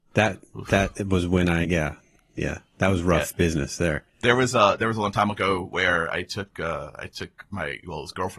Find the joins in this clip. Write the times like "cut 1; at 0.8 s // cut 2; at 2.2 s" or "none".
none

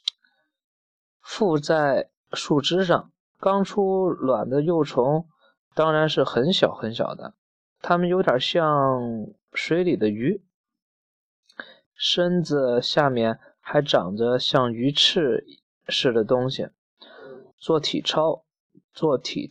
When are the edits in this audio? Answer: cut 1; at 3.3 s // cut 2; at 11.9 s // cut 3; at 17.5 s

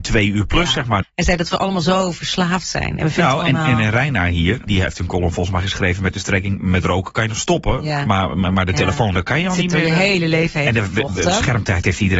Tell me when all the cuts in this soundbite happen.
cut 1; at 1.0 s // cut 2; at 4.7 s

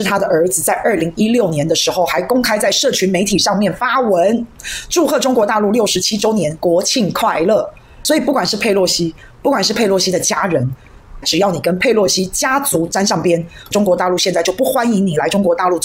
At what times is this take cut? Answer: cut 1; at 11.2 s // cut 2; at 13.7 s

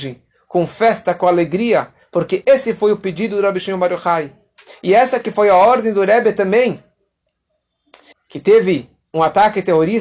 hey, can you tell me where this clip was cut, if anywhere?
cut 1; at 8.1 s

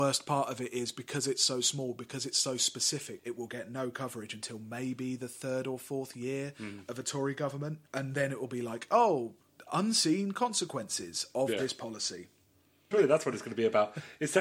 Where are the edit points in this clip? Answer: cut 1; at 3.2 s // cut 2; at 7.9 s // cut 3; at 12.9 s

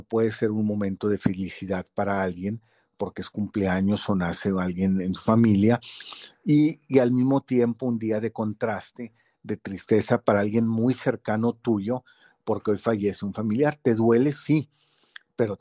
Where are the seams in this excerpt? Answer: none

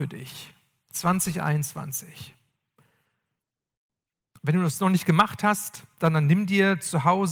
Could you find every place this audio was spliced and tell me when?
none

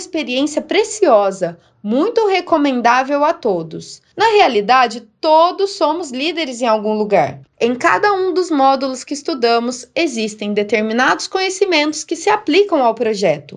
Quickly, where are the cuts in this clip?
cut 1; at 4.1 s // cut 2; at 7.5 s

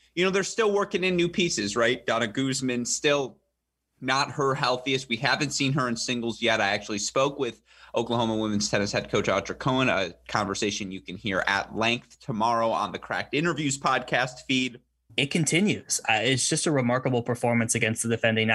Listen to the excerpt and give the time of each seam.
cut 1; at 15.1 s

